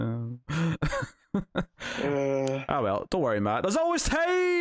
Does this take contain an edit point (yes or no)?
no